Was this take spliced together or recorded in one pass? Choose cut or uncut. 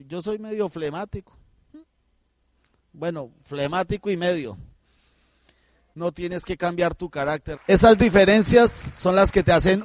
cut